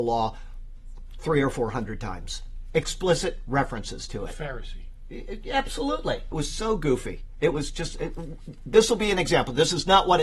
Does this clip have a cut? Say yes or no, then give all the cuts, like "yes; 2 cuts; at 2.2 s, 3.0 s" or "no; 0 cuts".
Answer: yes; 1 cut; at 6.3 s